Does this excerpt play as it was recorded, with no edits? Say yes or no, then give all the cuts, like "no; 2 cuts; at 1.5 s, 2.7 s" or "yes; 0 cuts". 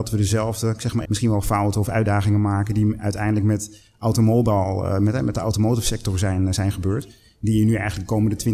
no; 1 cut; at 1.1 s